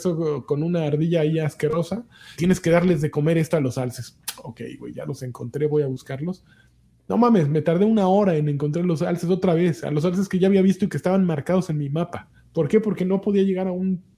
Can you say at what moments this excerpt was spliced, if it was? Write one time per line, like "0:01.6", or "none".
0:02.3